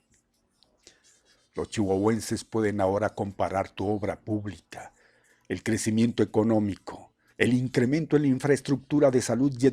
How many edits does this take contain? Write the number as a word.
one